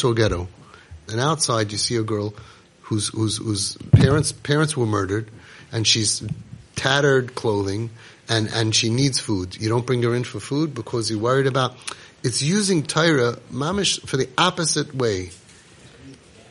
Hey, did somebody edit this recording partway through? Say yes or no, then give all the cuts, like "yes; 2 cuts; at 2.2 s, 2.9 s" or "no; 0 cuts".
yes; 1 cut; at 1.1 s